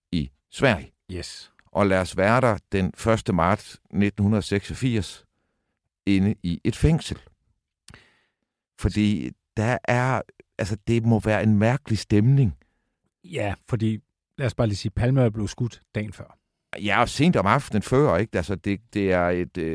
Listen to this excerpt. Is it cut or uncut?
uncut